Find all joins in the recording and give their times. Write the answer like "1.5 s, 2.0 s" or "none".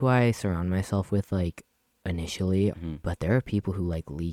2.7 s